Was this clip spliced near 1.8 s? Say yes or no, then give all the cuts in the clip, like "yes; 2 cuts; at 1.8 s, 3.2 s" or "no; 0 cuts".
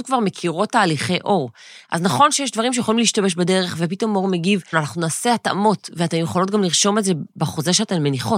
no; 1 cut; at 4.7 s